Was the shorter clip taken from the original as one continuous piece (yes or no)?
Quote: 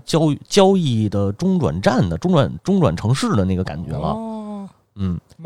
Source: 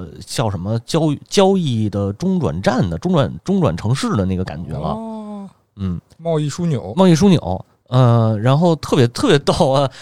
yes